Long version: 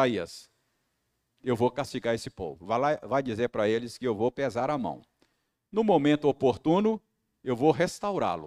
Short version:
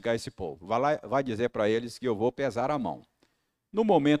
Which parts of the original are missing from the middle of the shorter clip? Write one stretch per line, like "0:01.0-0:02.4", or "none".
none